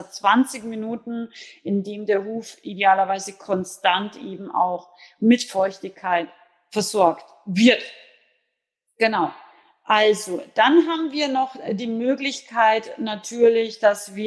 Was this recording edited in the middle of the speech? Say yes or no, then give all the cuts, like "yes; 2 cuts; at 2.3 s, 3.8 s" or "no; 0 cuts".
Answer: no; 0 cuts